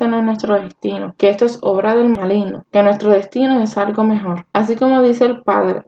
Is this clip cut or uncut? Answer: uncut